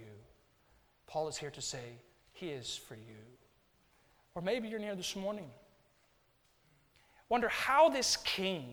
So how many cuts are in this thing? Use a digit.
0